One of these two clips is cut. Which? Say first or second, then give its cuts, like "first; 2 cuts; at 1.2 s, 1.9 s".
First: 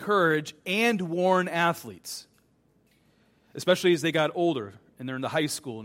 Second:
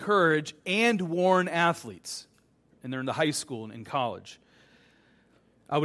second; 1 cut; at 2.7 s